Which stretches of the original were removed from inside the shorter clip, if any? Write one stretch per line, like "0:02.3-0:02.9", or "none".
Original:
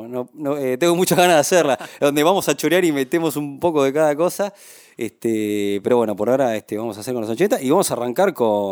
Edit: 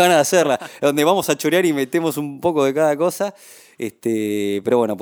none

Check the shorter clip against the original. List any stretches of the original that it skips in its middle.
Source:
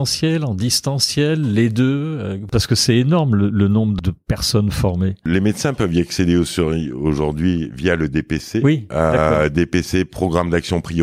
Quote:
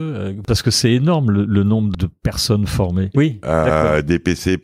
0:05.2-0:08.6

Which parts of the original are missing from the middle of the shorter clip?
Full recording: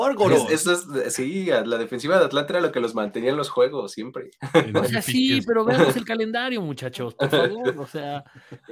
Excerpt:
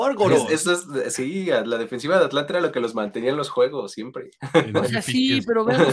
none

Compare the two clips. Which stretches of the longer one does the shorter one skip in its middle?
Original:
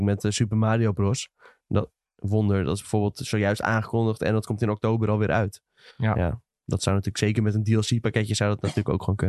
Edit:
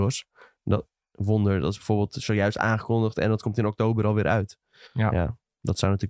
none

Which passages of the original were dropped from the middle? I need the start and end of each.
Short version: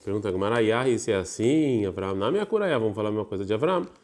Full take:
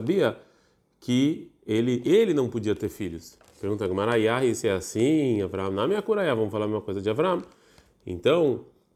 none

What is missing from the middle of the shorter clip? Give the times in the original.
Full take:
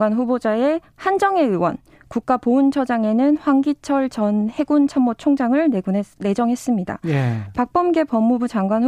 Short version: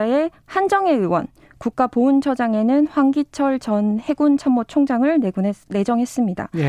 none

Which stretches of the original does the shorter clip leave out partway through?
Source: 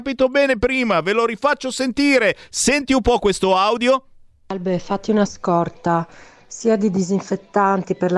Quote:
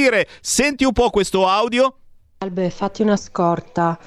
none

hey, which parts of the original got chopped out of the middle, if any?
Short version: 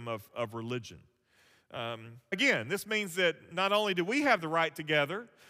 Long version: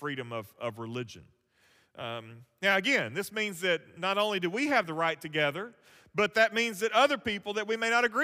0:02.6-0:02.8

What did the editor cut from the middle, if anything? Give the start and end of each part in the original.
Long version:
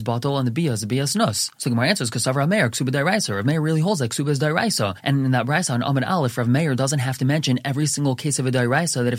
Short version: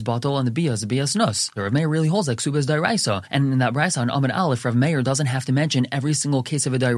0:01.6-0:03.3

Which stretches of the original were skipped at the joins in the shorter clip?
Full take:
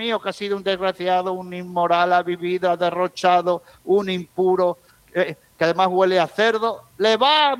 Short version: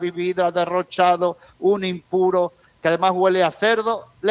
0:04.9-0:05.4

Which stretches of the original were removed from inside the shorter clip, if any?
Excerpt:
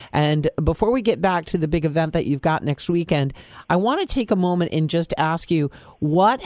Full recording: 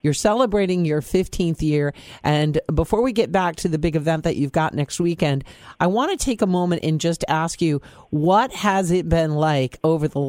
none

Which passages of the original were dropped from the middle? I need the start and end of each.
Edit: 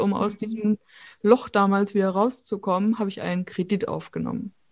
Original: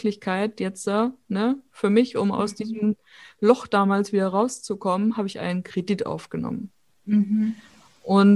none

